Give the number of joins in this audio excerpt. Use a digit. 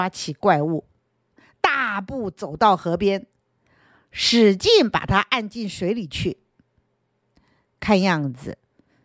0